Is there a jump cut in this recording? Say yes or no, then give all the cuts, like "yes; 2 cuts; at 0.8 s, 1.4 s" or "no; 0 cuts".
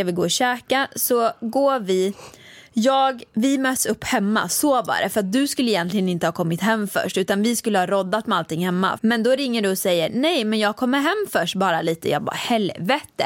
yes; 2 cuts; at 3.3 s, 9.0 s